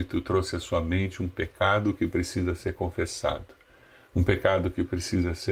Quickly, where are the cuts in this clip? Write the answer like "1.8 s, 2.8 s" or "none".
none